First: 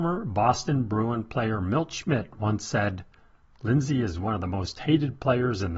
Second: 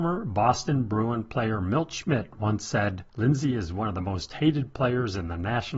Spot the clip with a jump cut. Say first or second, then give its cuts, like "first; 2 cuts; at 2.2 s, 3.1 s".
second; 1 cut; at 3.1 s